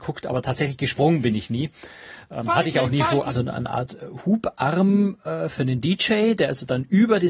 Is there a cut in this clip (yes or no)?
yes